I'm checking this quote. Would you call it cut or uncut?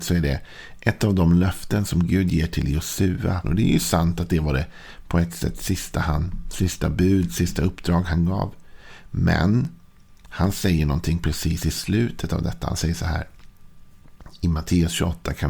cut